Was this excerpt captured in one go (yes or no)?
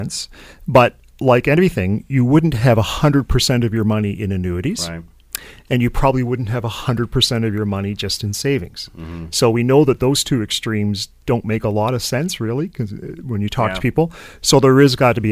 yes